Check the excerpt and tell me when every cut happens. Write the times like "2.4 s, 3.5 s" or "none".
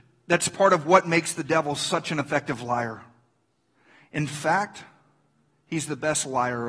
none